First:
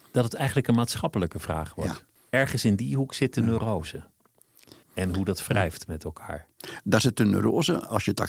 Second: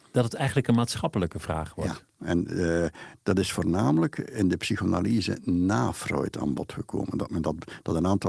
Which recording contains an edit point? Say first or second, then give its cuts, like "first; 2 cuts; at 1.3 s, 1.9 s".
first; 2 cuts; at 2.2 s, 4.8 s